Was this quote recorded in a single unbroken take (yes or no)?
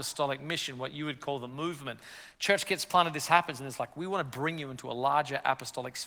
yes